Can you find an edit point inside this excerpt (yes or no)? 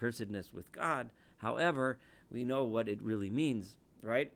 no